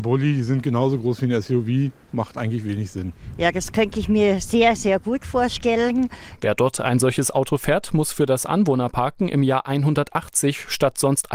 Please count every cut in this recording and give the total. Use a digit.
1